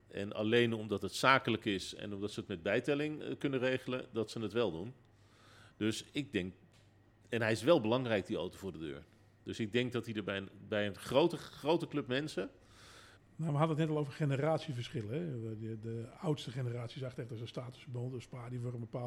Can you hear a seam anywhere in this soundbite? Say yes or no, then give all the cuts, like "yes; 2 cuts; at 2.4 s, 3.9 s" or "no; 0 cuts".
yes; 1 cut; at 13.2 s